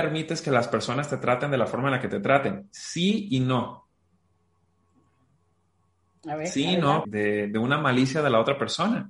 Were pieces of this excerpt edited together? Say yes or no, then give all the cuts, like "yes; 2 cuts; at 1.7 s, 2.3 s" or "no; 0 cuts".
yes; 1 cut; at 7.0 s